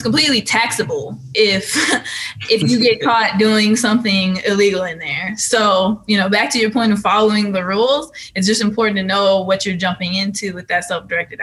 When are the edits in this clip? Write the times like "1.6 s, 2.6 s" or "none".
none